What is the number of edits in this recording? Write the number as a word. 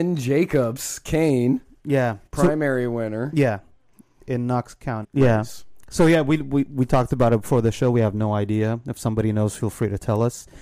two